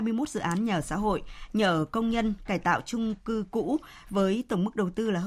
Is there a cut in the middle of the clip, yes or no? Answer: yes